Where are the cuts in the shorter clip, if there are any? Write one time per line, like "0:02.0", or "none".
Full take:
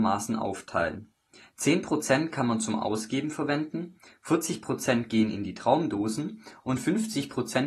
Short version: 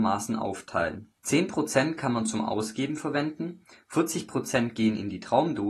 0:01.2